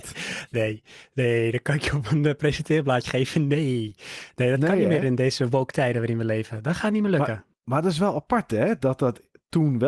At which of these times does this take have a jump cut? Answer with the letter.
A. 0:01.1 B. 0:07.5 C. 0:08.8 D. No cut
B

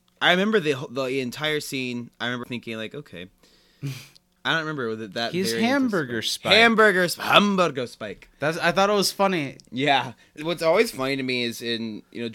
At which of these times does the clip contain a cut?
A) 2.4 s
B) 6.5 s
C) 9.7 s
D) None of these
A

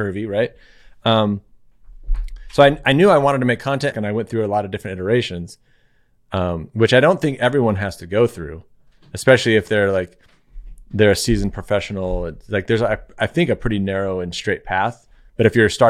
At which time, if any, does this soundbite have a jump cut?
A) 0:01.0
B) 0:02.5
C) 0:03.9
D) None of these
C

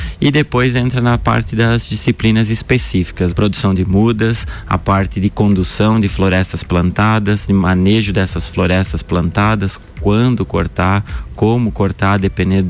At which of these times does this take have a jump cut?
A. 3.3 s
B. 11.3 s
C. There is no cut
A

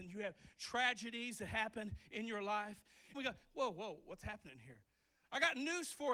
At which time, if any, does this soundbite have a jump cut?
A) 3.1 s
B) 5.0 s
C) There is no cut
A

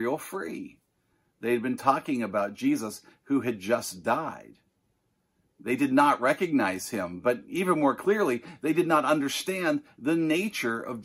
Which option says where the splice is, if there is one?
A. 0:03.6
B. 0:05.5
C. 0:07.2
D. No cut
D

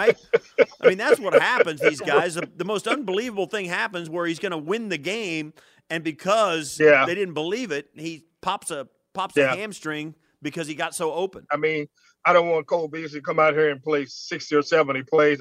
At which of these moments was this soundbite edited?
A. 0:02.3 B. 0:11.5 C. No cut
B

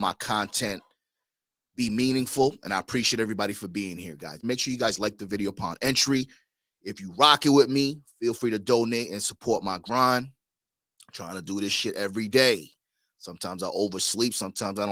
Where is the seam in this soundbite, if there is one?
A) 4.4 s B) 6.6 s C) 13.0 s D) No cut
A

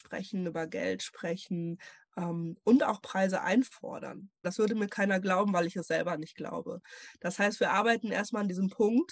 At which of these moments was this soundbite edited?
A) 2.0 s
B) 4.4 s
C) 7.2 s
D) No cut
B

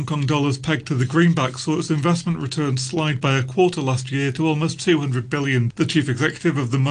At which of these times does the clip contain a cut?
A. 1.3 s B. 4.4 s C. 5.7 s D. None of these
C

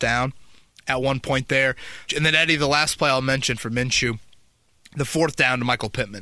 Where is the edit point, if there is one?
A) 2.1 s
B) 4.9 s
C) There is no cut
A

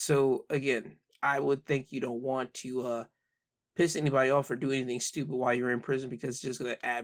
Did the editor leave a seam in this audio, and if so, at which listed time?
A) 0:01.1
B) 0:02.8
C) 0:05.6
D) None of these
A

